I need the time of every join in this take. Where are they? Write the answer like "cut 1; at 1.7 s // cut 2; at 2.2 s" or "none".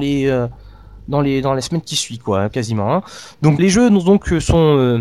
cut 1; at 3.6 s